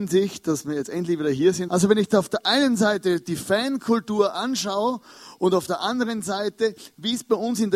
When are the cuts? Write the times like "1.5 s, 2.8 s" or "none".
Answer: 1.7 s